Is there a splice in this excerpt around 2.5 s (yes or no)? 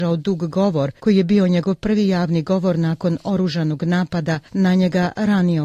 no